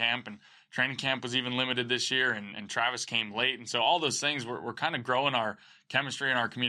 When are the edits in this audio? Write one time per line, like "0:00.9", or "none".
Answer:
none